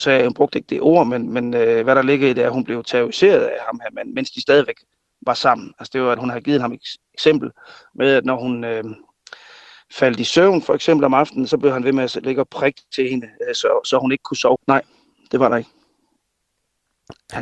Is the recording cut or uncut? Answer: cut